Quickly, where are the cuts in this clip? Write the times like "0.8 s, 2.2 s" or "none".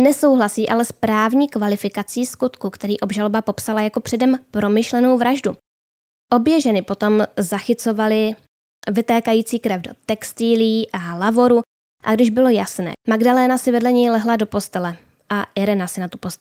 6.2 s, 12.9 s